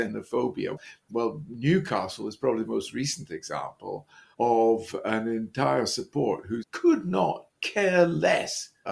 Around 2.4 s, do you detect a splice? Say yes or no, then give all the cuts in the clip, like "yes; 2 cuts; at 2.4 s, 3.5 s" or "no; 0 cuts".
no; 1 cut; at 1.0 s